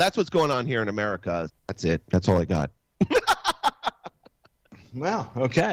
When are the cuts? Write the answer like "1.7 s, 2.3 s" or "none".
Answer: 1.5 s